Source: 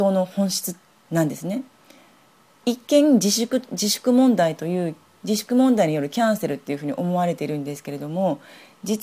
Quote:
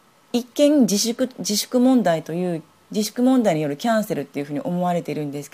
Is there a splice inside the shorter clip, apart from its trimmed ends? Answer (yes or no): no